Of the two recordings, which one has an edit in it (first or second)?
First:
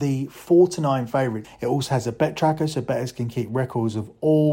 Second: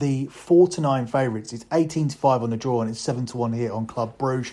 first